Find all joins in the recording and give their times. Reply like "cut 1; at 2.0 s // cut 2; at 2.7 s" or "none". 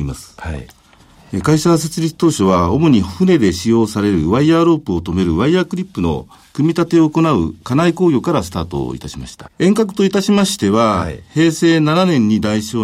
cut 1; at 9.5 s